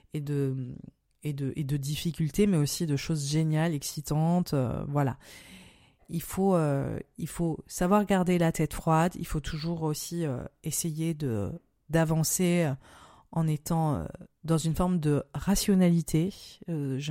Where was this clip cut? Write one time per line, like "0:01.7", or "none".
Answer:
none